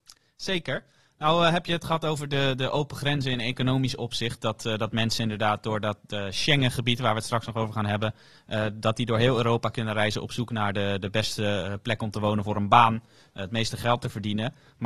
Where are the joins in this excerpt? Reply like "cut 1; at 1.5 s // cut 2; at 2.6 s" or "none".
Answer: none